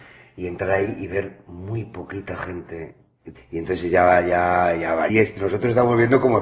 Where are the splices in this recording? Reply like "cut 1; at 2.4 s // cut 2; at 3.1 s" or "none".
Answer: cut 1; at 3.4 s // cut 2; at 5.1 s